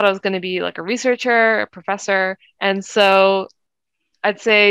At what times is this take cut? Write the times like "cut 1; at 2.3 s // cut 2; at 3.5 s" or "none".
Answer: cut 1; at 2.6 s